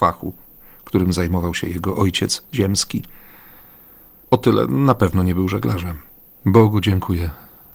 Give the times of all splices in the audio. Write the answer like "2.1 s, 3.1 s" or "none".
6.4 s